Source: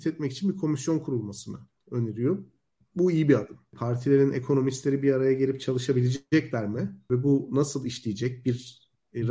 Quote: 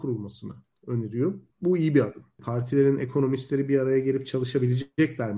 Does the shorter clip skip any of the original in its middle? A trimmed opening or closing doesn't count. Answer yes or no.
yes